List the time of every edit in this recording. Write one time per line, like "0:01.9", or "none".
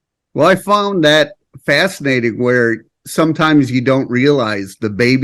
0:02.9